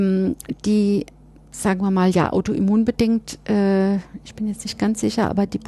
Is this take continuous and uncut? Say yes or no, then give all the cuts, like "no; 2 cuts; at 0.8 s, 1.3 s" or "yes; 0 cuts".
yes; 0 cuts